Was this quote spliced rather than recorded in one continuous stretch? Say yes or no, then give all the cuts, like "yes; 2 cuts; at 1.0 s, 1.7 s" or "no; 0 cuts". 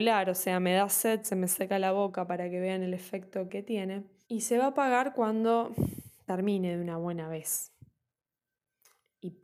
yes; 1 cut; at 3.5 s